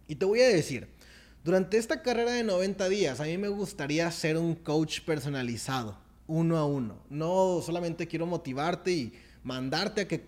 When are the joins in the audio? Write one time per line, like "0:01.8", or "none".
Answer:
none

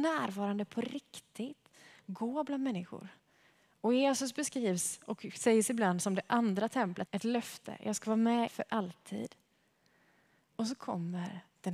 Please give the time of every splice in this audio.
0:07.1
0:08.5

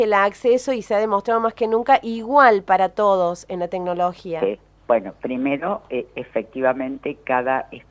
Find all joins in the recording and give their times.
0:04.8

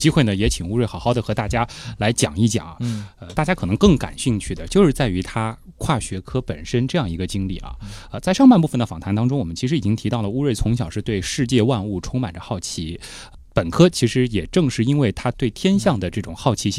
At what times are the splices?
0:03.4

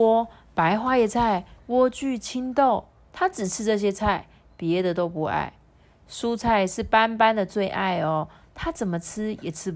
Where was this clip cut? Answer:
0:01.6

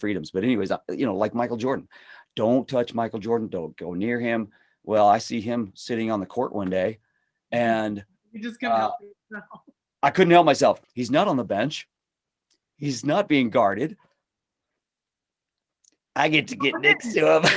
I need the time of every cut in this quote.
0:10.8

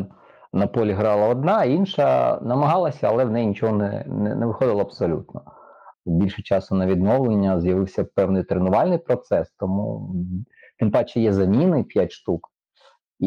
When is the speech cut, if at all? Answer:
0:05.9

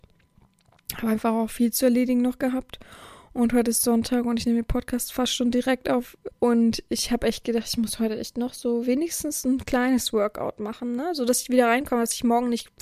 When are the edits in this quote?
0:06.3

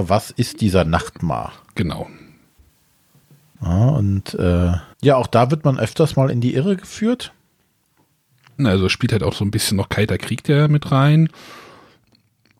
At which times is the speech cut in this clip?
0:04.9
0:08.6

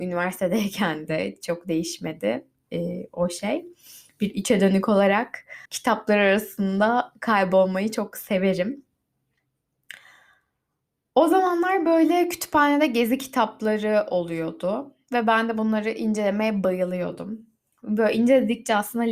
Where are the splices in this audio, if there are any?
0:05.7

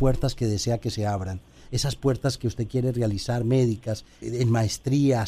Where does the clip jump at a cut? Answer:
0:04.2

